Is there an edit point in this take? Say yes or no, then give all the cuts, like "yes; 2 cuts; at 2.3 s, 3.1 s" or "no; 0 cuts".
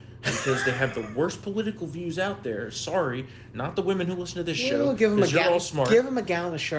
no; 0 cuts